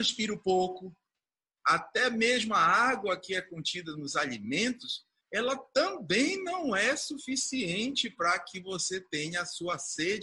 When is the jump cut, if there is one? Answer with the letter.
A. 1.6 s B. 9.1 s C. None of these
A